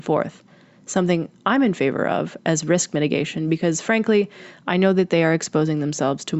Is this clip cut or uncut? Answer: uncut